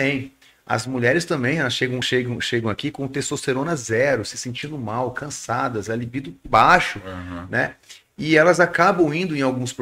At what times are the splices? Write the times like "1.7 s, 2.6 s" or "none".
none